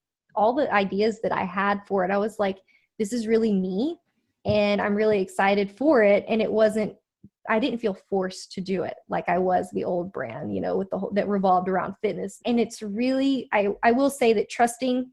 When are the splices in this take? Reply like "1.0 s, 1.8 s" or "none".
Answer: 12.4 s